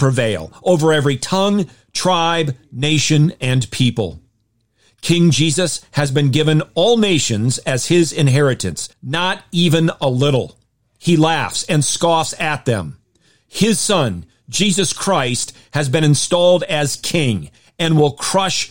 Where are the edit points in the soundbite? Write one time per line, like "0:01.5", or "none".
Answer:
0:08.9